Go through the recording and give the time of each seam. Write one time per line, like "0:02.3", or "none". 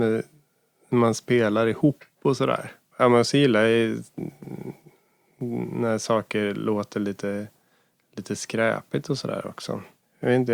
none